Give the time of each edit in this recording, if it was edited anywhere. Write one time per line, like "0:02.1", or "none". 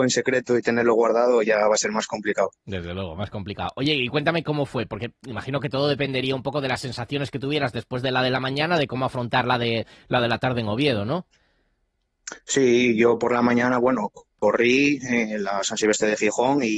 none